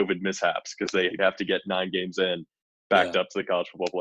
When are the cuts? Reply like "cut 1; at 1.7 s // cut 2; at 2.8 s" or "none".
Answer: cut 1; at 1.2 s